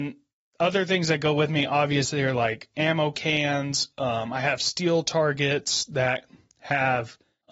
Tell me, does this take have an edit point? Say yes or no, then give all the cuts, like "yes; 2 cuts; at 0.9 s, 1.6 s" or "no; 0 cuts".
no; 0 cuts